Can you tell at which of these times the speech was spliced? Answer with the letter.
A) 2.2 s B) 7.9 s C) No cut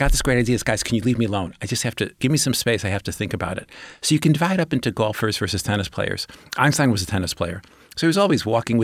A